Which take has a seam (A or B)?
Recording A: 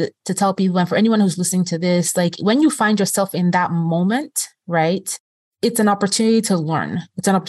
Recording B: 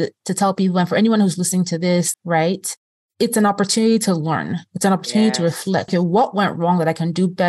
B